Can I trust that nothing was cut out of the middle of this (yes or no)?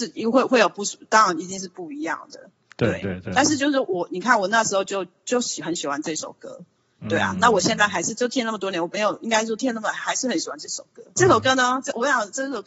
yes